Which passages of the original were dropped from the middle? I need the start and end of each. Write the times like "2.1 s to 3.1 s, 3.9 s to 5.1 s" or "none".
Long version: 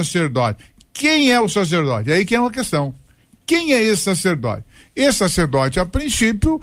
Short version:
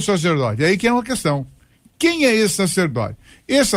none